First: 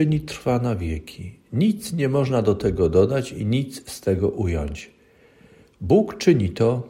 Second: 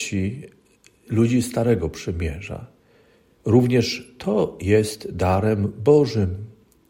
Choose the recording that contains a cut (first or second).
second